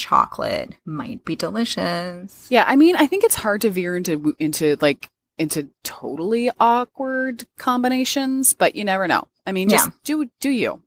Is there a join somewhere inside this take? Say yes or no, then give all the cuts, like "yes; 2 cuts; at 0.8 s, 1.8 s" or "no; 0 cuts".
no; 0 cuts